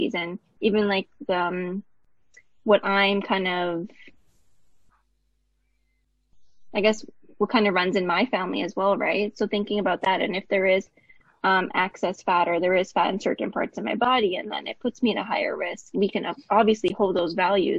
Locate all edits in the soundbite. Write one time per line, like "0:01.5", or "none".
0:15.9